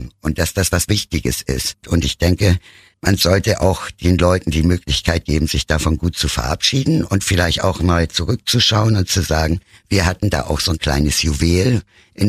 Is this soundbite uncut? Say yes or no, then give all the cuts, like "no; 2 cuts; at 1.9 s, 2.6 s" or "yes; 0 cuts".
yes; 0 cuts